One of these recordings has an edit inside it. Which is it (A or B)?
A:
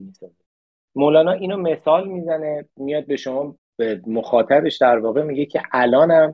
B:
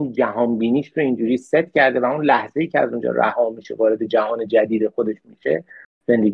A